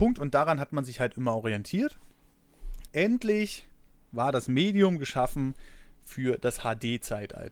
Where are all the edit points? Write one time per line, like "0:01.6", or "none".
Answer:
0:02.9